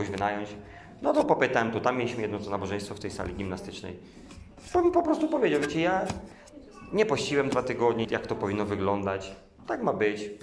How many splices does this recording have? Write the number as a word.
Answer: one